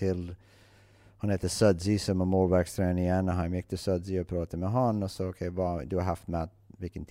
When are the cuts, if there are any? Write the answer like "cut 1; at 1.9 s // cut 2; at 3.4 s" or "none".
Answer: none